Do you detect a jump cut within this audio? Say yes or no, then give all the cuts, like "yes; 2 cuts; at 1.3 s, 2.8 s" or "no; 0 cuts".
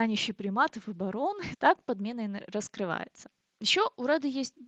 yes; 1 cut; at 1.5 s